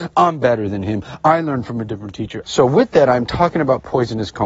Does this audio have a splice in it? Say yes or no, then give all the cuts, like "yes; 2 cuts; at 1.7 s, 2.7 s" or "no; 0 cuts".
yes; 1 cut; at 2.4 s